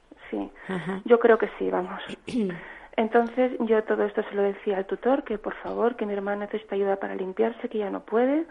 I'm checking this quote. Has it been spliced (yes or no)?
no